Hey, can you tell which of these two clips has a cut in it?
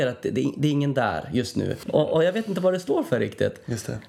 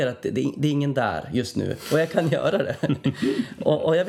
first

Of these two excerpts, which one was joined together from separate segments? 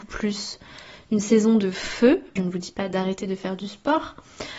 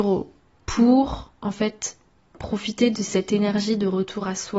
first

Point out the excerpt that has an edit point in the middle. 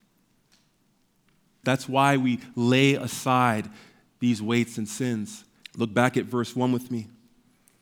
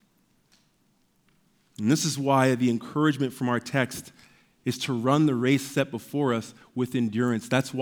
first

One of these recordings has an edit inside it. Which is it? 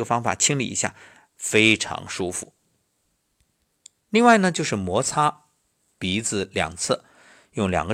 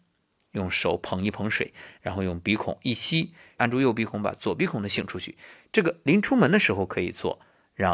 second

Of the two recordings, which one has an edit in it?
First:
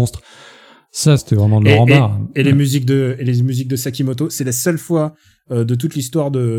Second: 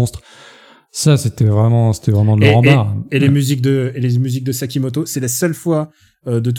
first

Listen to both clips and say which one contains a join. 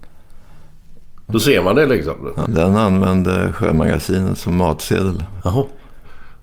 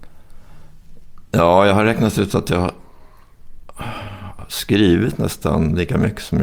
first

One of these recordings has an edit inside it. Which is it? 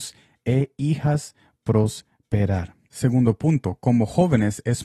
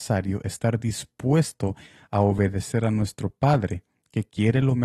first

